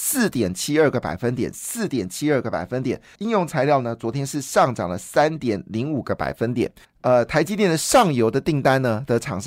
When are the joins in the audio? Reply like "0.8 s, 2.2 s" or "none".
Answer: 3.1 s, 6.8 s